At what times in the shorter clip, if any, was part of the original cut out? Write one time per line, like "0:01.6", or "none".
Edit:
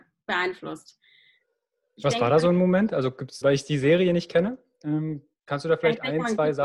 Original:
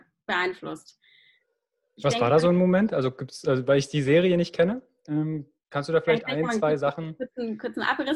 0:03.4